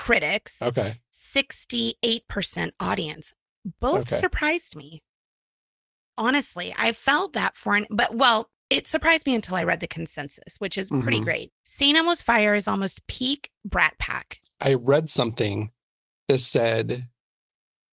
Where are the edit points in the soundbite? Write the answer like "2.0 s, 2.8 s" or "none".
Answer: 11.6 s, 14.4 s